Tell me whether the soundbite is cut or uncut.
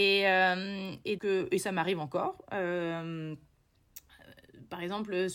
cut